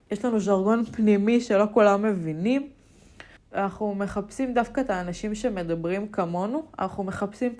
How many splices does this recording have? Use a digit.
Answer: 1